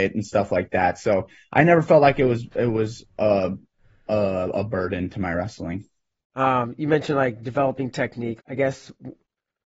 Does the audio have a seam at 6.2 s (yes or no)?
yes